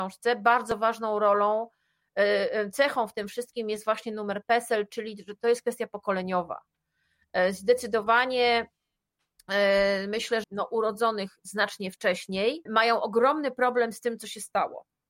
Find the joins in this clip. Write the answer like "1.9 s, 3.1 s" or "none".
10.4 s, 12.7 s